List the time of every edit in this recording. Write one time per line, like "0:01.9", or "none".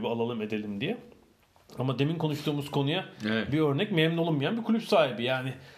none

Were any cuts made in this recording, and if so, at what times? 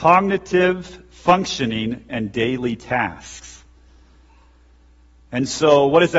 0:02.1

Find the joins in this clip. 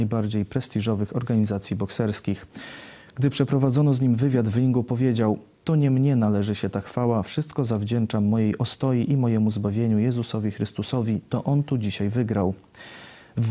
none

